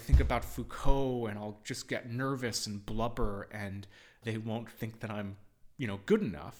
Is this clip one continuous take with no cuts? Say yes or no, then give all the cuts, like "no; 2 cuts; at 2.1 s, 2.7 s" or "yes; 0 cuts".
no; 1 cut; at 4.2 s